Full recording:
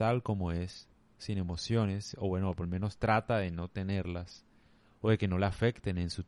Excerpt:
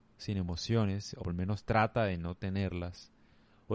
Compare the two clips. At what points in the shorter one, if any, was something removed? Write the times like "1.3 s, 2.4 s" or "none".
1.2 s